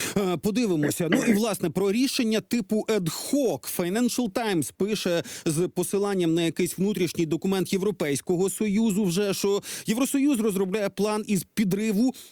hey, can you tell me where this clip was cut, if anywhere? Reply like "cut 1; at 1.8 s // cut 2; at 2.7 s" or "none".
none